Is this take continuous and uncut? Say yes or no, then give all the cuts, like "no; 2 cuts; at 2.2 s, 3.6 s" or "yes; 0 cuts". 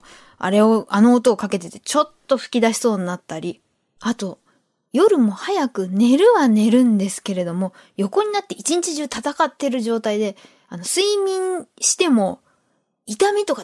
yes; 0 cuts